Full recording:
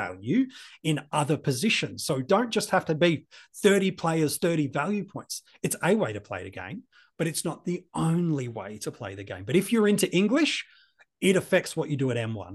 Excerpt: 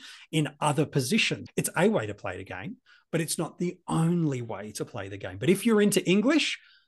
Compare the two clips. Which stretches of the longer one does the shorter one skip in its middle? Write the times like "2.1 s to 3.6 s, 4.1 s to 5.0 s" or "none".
2.0 s to 5.5 s

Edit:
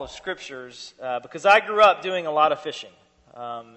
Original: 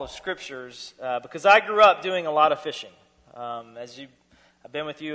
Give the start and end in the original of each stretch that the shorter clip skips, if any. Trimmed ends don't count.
none

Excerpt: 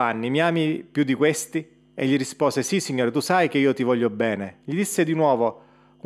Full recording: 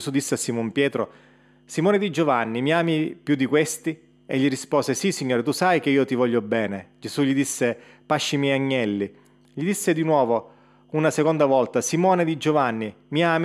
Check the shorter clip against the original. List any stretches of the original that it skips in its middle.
6.9 s to 9.5 s

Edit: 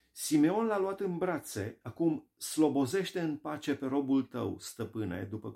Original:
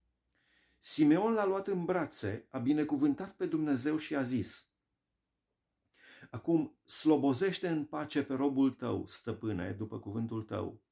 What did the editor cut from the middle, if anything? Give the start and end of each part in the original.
2.5 s to 6.3 s

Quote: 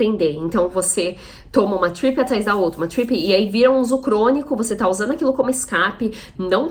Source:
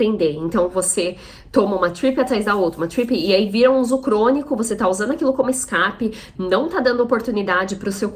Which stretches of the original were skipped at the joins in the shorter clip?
none

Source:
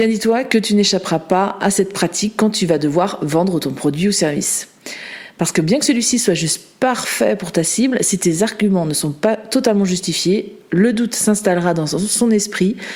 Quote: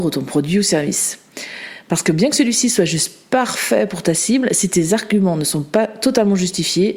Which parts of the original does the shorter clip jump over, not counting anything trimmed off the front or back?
none

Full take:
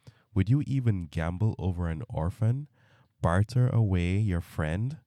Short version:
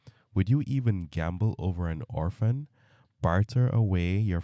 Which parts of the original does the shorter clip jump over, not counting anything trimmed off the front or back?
none

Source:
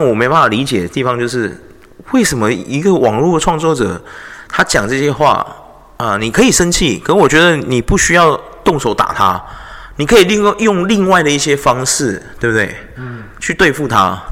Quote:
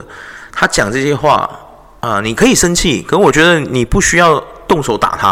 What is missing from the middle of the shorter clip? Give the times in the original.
none

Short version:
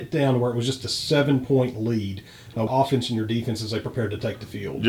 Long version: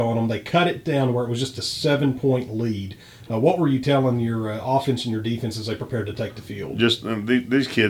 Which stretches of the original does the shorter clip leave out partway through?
3.4 s to 4.6 s

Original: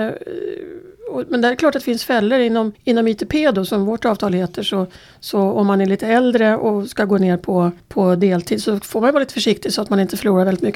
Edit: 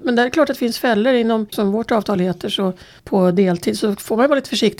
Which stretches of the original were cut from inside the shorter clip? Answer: 2.8 s to 3.7 s, 5.1 s to 7.8 s

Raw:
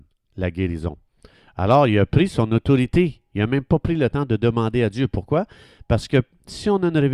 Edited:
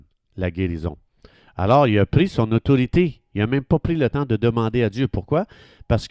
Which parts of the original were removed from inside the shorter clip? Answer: none

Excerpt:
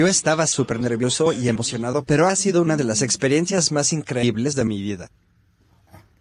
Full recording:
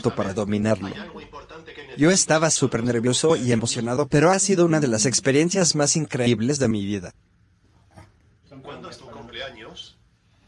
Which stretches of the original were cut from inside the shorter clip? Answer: none

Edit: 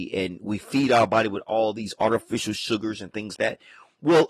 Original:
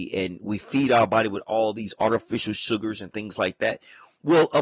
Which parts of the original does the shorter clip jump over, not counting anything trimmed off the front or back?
3.4 s to 3.6 s

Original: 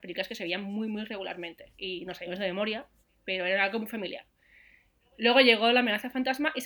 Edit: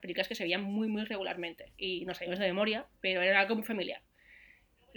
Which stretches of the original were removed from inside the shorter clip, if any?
2.9 s to 3.2 s

